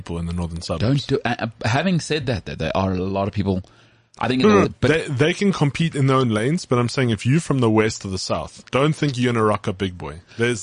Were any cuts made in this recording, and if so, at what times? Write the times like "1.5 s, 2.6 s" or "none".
4.6 s, 8.7 s